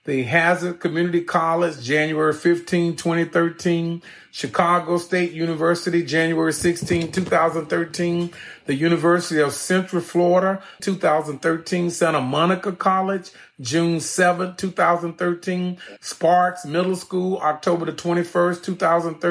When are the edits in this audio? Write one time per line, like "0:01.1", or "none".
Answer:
0:10.8
0:16.0